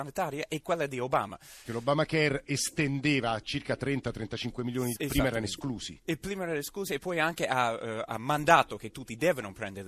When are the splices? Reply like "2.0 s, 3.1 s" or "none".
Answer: 1.6 s, 4.9 s